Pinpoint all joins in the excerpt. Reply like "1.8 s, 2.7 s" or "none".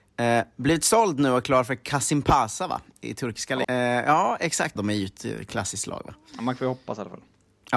3.6 s, 4.8 s